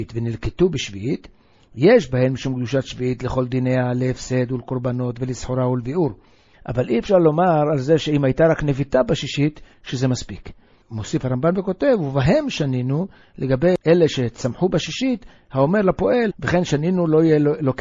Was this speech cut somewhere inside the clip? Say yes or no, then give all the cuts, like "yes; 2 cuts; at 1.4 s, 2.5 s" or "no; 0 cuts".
yes; 2 cuts; at 6.5 s, 16.3 s